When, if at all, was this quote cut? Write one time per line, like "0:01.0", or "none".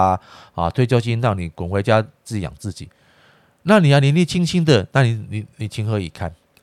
none